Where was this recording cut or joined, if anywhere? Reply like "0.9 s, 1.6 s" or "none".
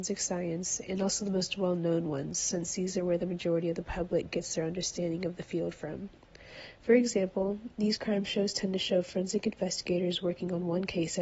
none